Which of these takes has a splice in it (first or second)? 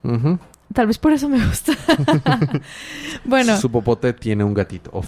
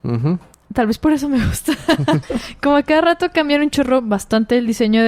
second